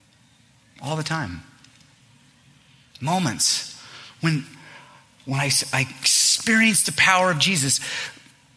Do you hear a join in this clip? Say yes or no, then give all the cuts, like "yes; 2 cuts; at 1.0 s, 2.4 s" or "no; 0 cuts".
no; 0 cuts